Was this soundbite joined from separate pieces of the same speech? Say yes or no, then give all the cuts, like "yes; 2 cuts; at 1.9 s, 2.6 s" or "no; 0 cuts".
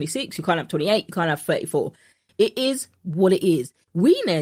no; 0 cuts